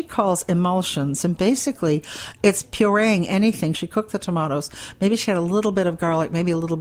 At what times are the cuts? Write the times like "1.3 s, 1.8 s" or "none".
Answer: 3.7 s